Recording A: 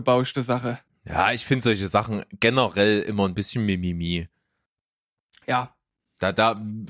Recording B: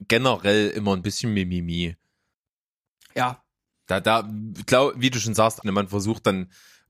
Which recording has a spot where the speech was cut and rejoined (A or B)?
B